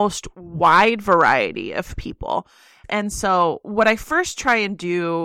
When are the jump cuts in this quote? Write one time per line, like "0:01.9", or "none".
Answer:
none

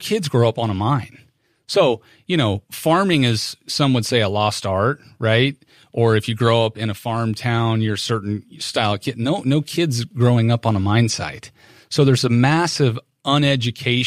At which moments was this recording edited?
none

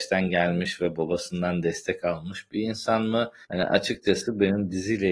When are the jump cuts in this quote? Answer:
0:03.4

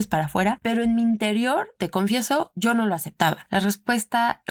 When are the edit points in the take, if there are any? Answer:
0:03.5

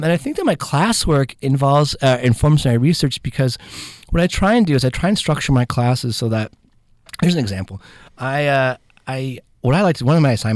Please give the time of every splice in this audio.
none

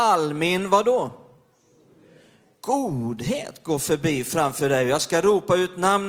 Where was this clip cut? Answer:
none

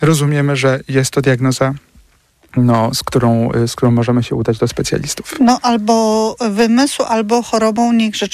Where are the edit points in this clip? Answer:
none

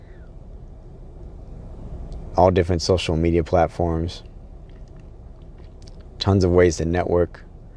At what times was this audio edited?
none

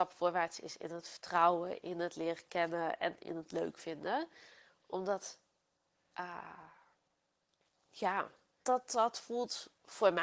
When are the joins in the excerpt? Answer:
0:08.6

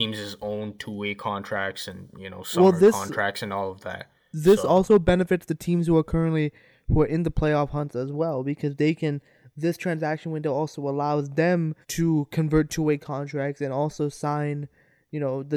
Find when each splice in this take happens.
0:11.8

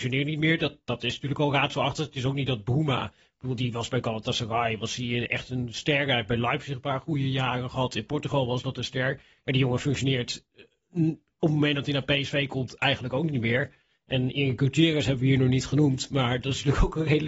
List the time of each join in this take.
none

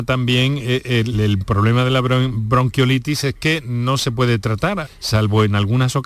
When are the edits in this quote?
0:01.1
0:04.8

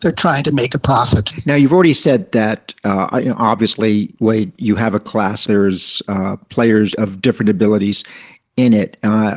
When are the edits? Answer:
0:05.4
0:06.9

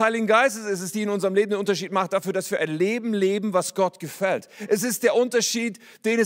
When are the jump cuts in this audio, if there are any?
none

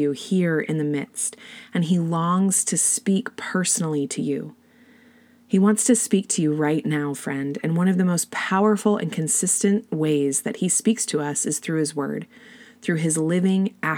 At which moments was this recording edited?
none

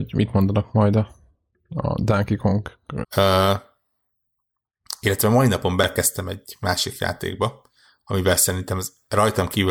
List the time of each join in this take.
0:03.0

